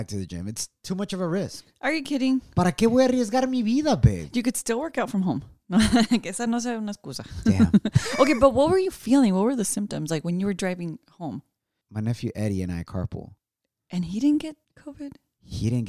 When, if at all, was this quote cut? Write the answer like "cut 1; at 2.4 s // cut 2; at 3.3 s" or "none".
none